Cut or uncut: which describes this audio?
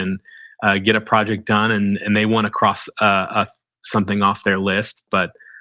uncut